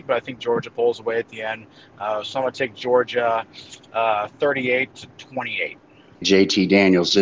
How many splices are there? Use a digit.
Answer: 1